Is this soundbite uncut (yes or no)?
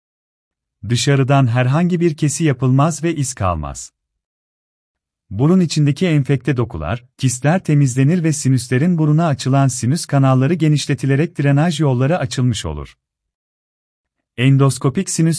no